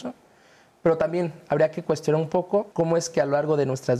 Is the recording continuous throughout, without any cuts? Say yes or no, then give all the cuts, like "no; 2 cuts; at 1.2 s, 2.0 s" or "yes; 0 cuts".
no; 1 cut; at 2.7 s